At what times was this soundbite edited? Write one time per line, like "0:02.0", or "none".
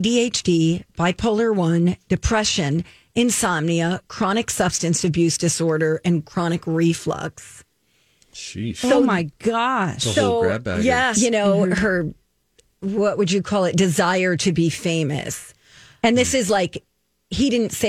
0:11.1